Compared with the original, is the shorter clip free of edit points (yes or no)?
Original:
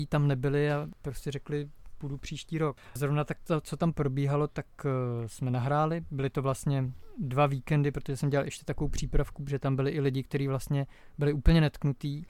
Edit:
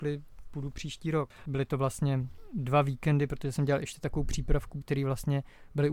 no